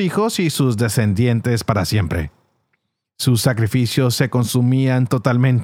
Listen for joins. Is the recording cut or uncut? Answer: uncut